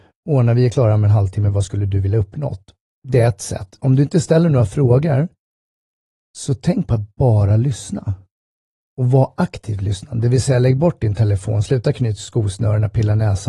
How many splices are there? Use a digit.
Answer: 0